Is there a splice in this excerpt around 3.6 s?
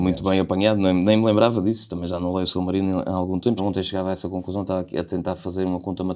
yes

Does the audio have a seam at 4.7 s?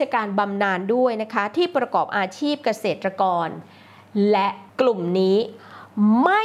yes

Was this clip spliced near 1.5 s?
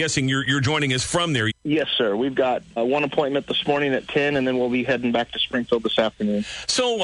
yes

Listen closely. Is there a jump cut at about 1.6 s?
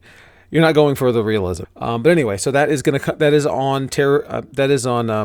yes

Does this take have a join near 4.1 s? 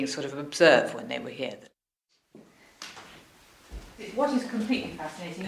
no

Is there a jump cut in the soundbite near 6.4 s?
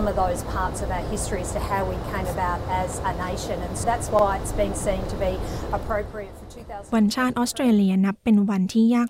no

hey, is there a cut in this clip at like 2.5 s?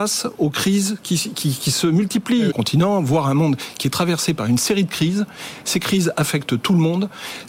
yes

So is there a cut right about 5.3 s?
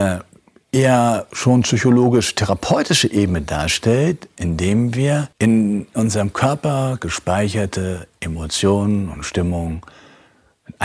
yes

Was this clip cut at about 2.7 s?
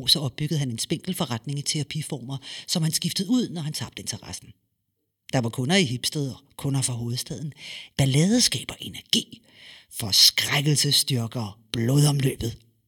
no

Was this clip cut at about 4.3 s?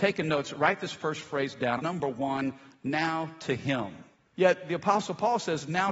yes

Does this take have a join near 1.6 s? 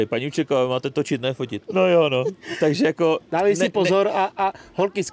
yes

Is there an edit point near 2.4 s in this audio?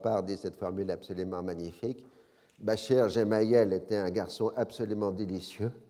no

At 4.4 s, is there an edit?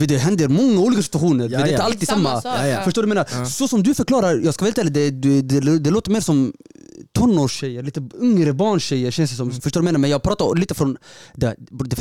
no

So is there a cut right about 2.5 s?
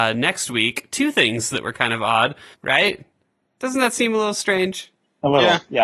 yes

